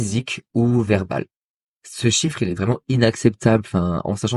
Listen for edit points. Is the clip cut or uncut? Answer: uncut